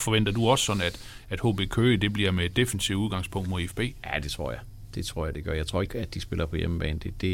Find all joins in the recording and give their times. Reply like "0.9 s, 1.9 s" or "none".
5.9 s